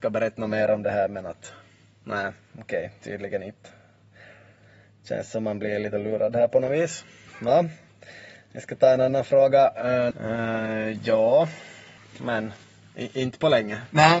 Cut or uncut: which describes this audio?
cut